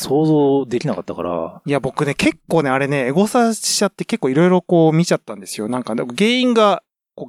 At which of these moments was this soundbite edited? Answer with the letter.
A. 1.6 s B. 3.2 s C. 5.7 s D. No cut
D